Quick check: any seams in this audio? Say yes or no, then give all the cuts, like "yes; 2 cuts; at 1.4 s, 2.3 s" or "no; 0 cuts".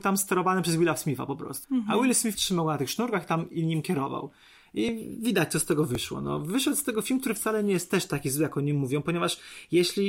yes; 1 cut; at 1.6 s